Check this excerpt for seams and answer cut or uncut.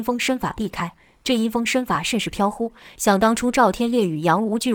uncut